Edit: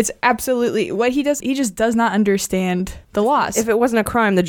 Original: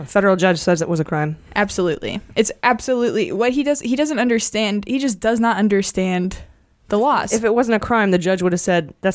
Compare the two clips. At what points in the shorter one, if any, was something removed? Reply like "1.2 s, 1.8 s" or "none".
1.4 s, 3.0 s